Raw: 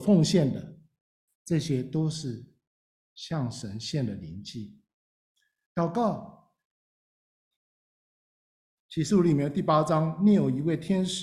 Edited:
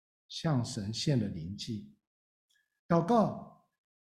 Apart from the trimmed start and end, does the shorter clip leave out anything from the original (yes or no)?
no